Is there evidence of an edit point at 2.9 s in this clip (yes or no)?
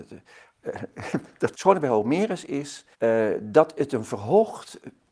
yes